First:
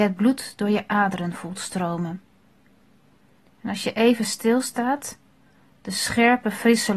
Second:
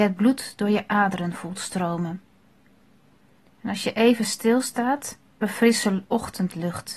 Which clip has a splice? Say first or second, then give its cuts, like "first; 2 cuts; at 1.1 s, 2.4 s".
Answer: second; 1 cut; at 5.4 s